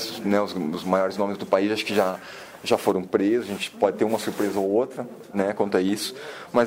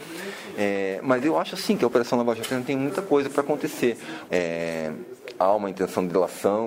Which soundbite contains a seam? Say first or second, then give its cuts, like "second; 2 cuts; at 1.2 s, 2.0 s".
second; 1 cut; at 4.3 s